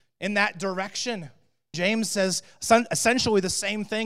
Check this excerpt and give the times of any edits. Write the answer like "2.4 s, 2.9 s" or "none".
1.7 s